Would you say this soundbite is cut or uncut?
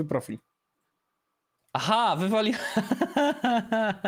uncut